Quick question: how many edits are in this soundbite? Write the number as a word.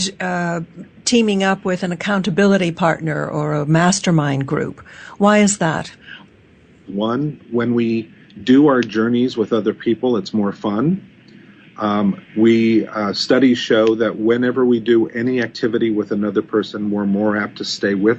one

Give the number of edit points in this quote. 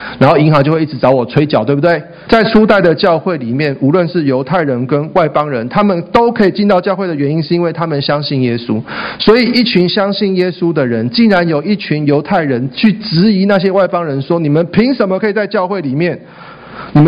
one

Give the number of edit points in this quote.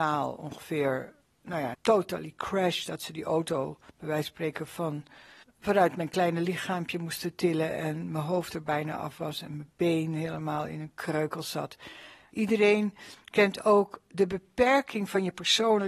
two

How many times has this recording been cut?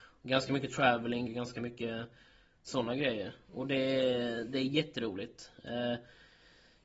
one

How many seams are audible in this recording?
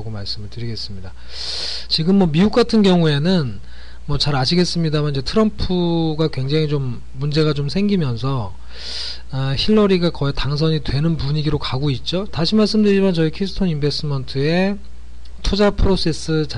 two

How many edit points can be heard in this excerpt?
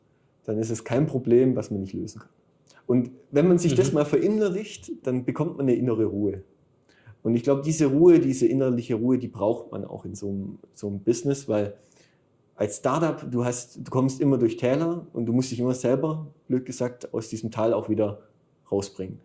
one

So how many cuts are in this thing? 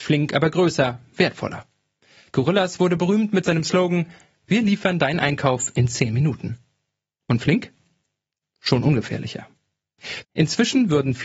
two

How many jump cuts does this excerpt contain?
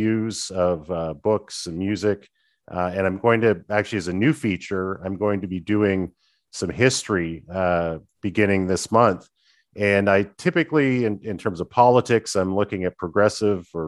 zero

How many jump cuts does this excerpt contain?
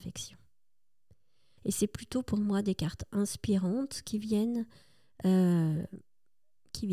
one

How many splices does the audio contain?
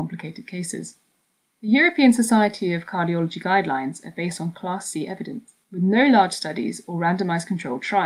two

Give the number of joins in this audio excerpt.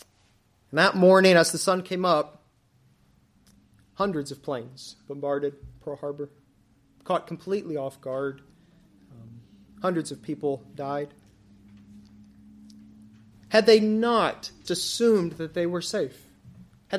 two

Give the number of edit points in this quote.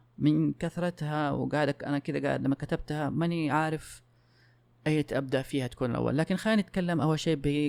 zero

